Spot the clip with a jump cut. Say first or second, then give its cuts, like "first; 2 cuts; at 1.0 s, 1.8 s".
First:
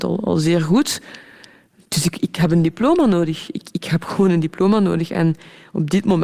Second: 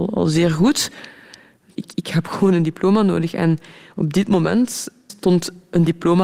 second; 2 cuts; at 1.8 s, 5.1 s